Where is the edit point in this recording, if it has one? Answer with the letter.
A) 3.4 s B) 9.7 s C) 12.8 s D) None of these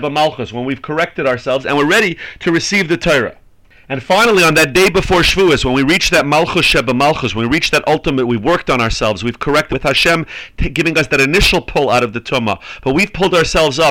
B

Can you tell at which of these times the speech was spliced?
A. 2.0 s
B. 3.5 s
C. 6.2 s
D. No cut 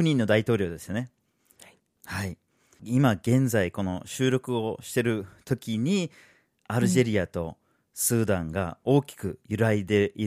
A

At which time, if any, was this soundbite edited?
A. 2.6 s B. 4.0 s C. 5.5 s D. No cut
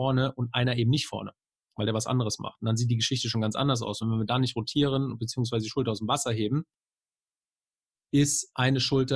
D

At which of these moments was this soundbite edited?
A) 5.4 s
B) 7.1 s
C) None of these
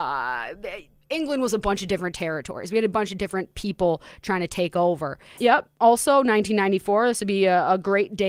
A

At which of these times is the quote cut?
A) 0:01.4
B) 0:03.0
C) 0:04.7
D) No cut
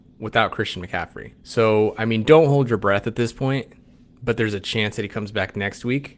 A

